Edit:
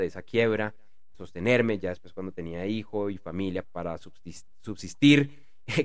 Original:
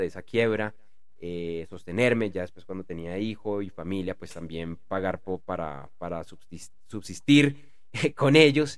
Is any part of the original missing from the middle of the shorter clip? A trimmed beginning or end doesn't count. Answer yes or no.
yes